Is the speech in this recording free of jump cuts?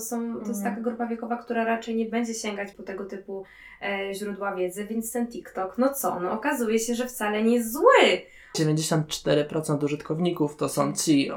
no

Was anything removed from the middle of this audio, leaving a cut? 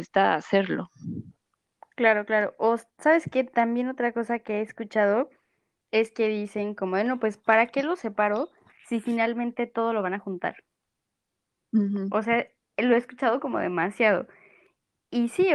no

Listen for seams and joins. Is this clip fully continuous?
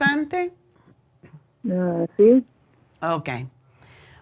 yes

